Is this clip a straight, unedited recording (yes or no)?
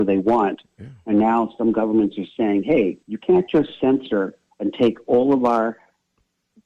no